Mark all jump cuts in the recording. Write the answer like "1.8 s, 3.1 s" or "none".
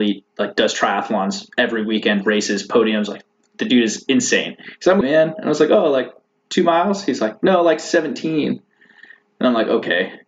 5.0 s

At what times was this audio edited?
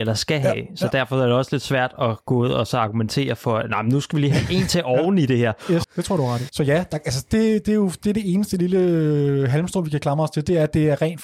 5.8 s

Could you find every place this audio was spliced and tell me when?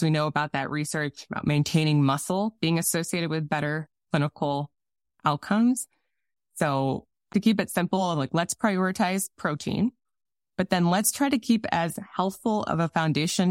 7.3 s

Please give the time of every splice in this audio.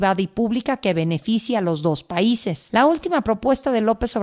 none

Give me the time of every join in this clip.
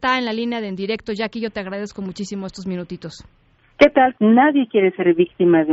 4.1 s

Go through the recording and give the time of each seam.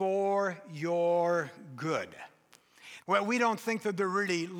3.0 s

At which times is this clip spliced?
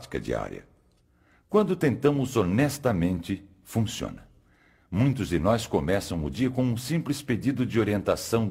none

